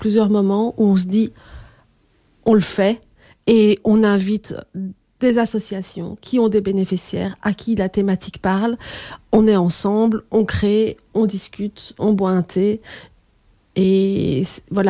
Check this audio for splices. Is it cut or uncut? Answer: uncut